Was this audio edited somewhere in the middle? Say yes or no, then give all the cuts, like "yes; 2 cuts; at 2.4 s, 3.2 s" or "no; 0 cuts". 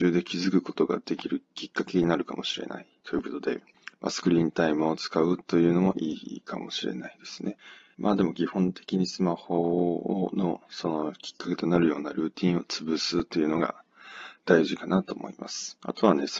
no; 0 cuts